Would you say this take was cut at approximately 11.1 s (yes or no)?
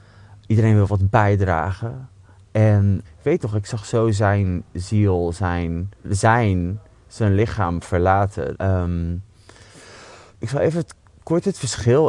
no